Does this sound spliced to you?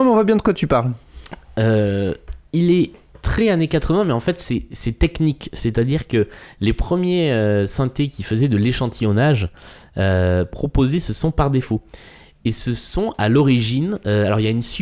no; 0 cuts

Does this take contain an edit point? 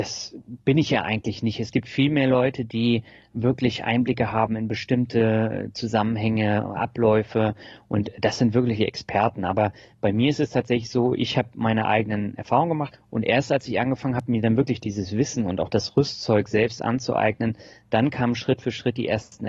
yes; 1 cut; at 12.9 s

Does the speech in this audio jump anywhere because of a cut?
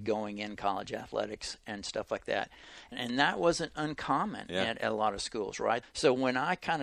yes; 2 cuts; at 2.9 s, 5.8 s

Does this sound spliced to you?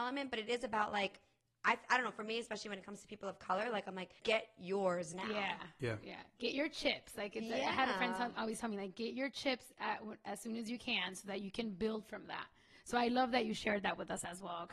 yes; 1 cut; at 4.2 s

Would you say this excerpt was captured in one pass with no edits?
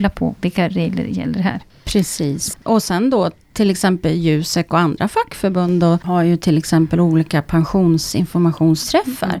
yes; 0 cuts

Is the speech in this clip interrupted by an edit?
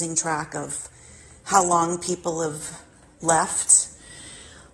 no; 0 cuts

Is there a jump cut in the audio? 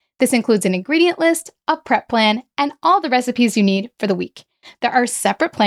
no; 0 cuts

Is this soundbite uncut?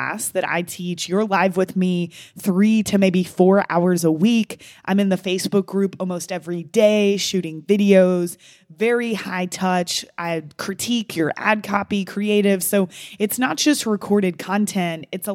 yes; 0 cuts

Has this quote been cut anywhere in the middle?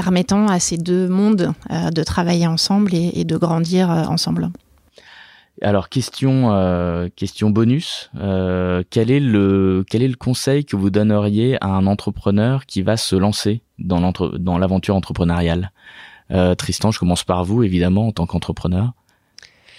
no; 0 cuts

